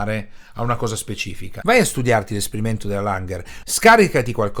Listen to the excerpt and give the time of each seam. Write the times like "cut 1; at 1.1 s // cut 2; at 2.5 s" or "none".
cut 1; at 1.6 s // cut 2; at 3.6 s